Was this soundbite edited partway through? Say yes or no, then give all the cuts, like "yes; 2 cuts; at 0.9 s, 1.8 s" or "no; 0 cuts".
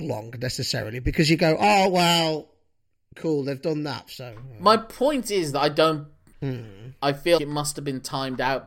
yes; 3 cuts; at 4.1 s, 6.3 s, 7.4 s